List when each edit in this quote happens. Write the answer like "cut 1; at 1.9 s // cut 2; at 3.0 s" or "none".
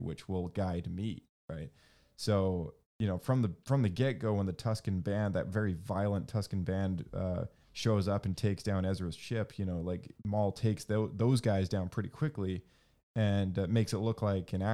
none